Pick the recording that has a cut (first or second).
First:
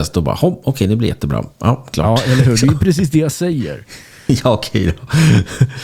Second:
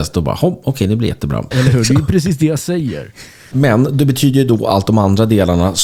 second